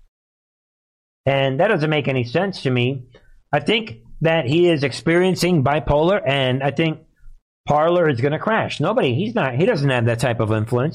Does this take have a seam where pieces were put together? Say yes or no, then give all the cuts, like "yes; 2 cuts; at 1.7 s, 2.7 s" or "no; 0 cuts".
no; 0 cuts